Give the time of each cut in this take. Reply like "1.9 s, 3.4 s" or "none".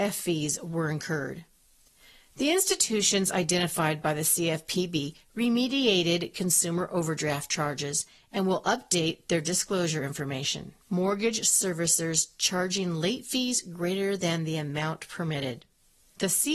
10.8 s